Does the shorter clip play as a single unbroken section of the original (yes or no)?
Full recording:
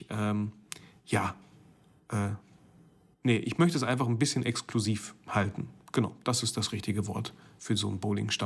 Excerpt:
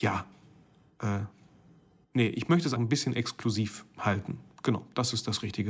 no